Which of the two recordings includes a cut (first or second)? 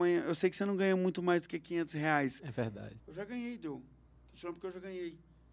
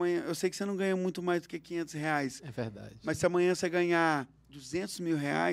first